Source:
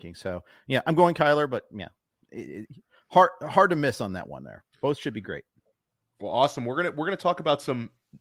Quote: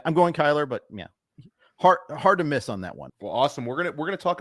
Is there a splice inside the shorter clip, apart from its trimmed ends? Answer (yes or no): yes